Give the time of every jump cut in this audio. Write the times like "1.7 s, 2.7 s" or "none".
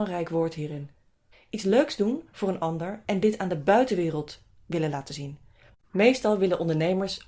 1.3 s, 5.7 s